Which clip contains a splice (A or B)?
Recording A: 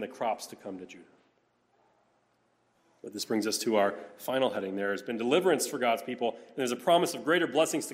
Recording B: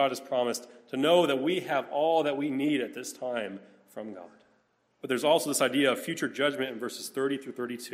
B